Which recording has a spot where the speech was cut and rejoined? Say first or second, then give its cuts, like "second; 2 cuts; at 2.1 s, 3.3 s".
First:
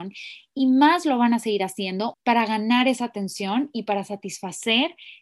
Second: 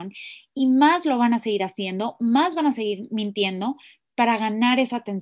first; 1 cut; at 2.1 s